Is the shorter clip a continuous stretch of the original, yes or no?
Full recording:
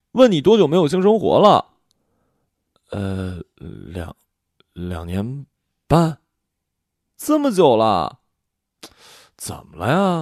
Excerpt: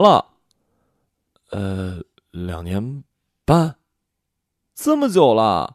no